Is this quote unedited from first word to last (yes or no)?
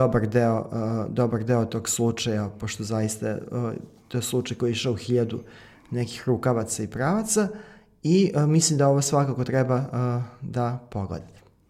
yes